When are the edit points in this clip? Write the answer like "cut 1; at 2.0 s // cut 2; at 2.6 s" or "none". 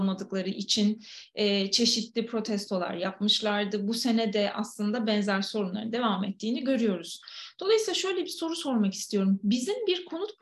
none